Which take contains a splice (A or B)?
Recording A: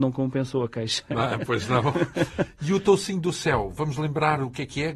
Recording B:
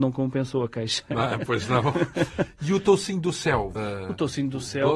B